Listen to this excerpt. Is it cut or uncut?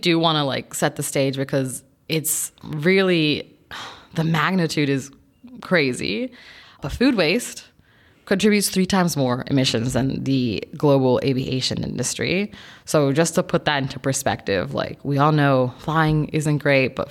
cut